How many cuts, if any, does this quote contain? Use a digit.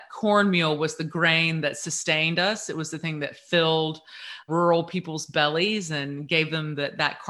1